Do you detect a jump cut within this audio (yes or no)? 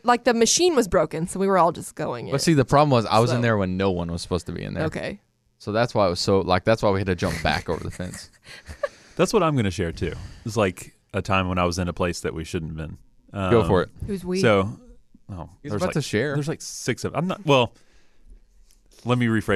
no